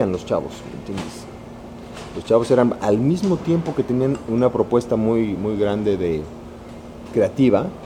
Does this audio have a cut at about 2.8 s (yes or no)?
yes